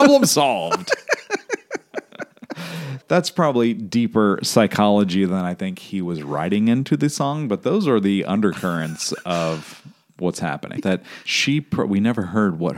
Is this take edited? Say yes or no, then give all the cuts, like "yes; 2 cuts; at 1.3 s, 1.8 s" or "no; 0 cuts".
yes; 2 cuts; at 3.0 s, 10.8 s